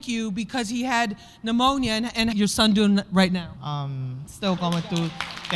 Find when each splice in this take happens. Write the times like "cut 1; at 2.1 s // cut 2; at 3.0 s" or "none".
cut 1; at 2.3 s // cut 2; at 3.6 s